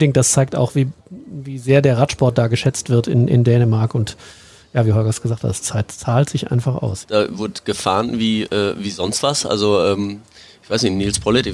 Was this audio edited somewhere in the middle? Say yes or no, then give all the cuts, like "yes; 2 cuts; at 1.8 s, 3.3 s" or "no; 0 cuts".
yes; 1 cut; at 7.0 s